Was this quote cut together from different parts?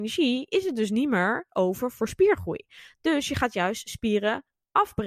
no; 0 cuts

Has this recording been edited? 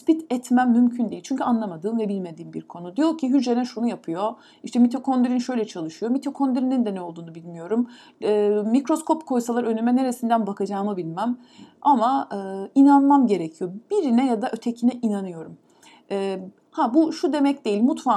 no; 0 cuts

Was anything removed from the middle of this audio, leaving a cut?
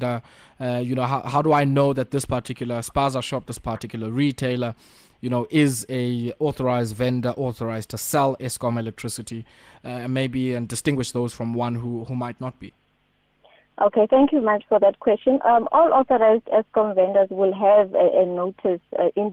yes; 1 cut; at 14.4 s

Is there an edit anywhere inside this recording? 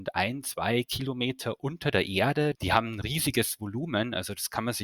yes; 1 cut; at 2.5 s

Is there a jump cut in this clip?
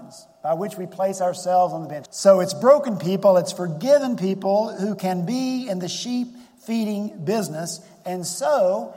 yes; 1 cut; at 2.1 s

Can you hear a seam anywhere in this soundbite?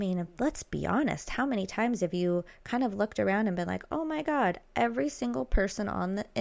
no; 0 cuts

